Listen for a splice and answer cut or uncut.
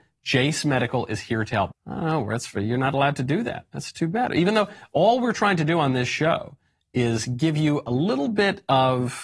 cut